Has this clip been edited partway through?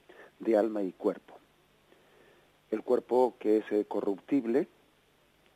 no; 0 cuts

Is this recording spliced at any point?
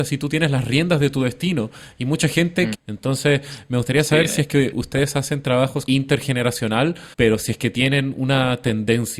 yes; 3 cuts; at 2.7 s, 5.9 s, 7.1 s

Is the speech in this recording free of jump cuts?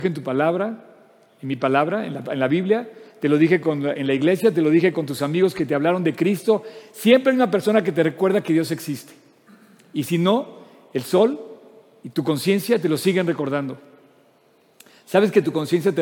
yes; 0 cuts

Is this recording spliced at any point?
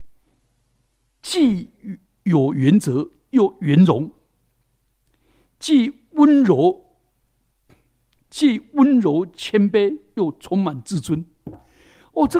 no; 0 cuts

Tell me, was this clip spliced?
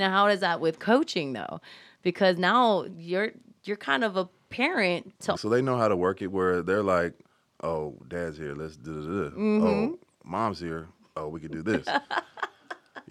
yes; 1 cut; at 5.4 s

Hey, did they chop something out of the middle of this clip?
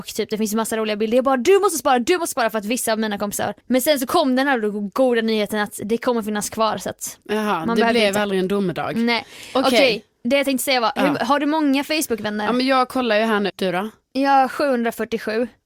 yes; 2 cuts; at 3.6 s, 13.5 s

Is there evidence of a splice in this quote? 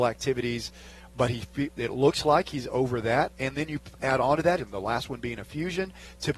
yes; 1 cut; at 4.6 s

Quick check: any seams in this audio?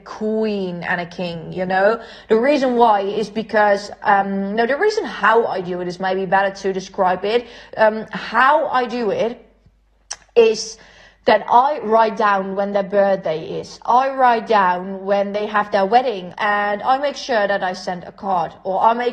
yes; 1 cut; at 16.3 s

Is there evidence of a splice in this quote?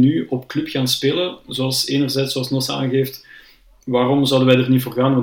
no; 0 cuts

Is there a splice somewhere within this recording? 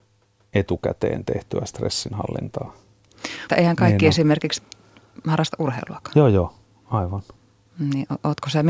yes; 1 cut; at 3.5 s

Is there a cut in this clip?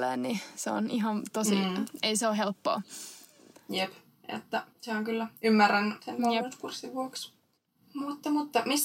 yes; 2 cuts; at 4.7 s, 6.0 s

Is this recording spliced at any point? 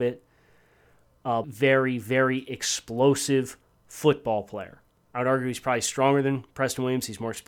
yes; 2 cuts; at 1.4 s, 5.1 s

